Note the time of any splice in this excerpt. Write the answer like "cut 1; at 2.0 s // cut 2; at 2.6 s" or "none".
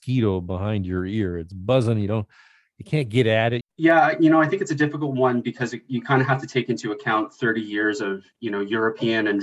cut 1; at 3.6 s